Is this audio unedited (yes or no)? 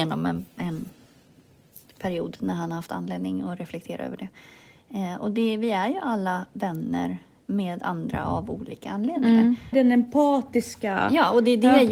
no